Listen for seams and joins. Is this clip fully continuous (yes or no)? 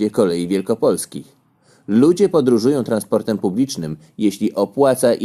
yes